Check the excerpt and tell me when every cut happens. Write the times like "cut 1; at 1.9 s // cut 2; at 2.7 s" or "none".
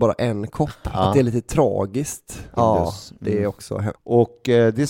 cut 1; at 2.6 s // cut 2; at 3.9 s